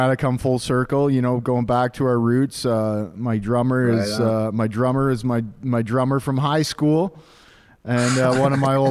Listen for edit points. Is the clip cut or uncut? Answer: uncut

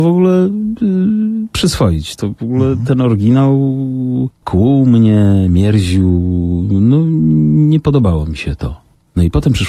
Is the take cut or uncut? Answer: uncut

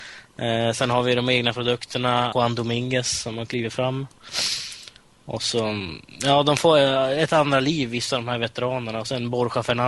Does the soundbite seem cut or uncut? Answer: cut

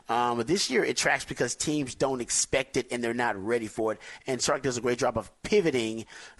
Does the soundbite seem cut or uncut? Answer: uncut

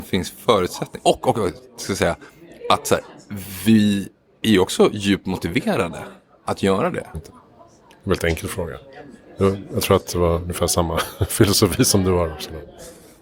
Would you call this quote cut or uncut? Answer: cut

